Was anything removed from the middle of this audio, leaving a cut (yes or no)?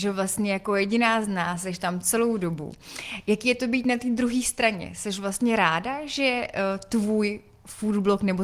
no